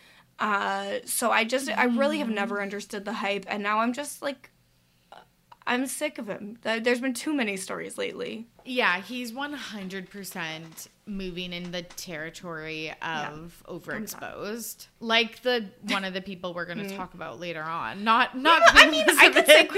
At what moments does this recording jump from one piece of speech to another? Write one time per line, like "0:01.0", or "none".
none